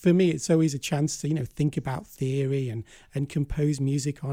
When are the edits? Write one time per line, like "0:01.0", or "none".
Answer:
none

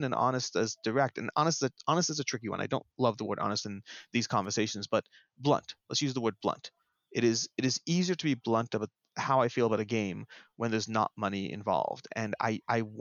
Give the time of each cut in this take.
none

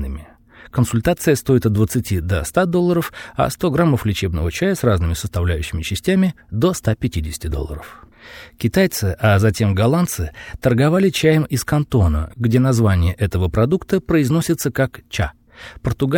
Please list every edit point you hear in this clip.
none

